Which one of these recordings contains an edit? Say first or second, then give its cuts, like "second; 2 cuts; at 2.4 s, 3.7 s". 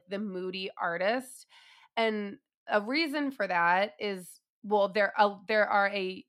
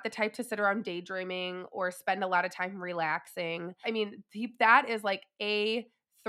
second; 1 cut; at 3.8 s